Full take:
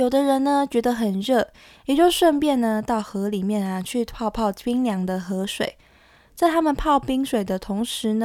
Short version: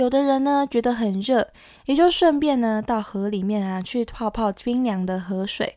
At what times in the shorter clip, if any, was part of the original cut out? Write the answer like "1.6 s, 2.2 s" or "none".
none